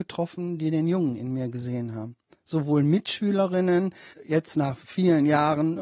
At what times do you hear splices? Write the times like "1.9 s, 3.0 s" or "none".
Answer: 4.1 s